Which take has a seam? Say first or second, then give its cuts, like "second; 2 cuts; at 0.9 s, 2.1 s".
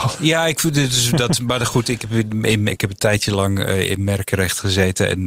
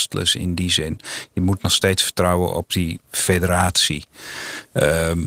first; 1 cut; at 2.7 s